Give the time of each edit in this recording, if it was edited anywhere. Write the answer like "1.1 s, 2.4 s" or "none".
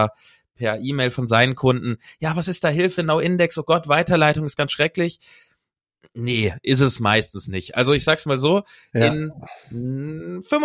none